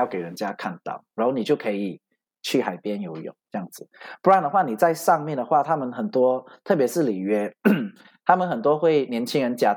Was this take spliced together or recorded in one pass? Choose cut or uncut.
uncut